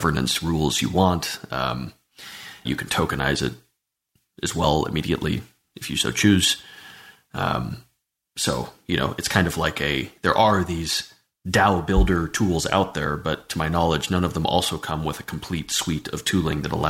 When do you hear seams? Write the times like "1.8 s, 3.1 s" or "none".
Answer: 2.6 s